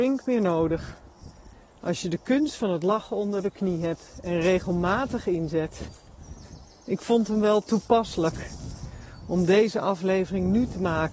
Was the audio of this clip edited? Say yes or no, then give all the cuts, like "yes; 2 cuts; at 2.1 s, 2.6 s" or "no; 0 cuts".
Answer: no; 0 cuts